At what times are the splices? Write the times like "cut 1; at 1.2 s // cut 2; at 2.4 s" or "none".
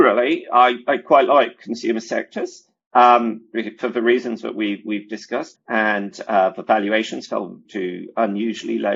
cut 1; at 5.5 s // cut 2; at 7.6 s